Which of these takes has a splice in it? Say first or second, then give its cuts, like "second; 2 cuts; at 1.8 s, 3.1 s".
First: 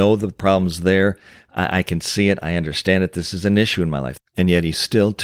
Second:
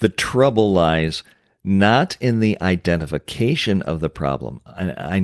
first; 1 cut; at 4.2 s